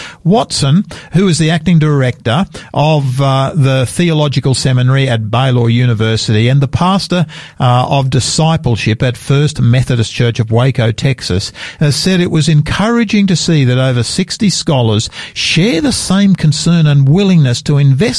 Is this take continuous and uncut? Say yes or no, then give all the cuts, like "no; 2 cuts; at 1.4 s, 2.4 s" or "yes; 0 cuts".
yes; 0 cuts